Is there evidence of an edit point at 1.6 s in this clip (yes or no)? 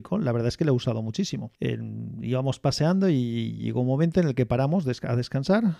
yes